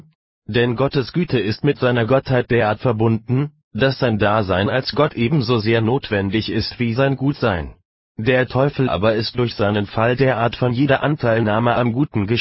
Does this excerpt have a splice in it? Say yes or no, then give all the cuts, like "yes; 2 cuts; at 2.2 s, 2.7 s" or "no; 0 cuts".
no; 0 cuts